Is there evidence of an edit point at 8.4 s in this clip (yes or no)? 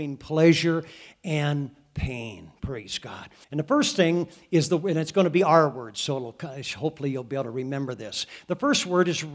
no